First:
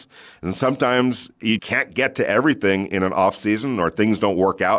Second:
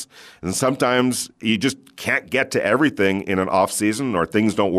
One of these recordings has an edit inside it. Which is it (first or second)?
first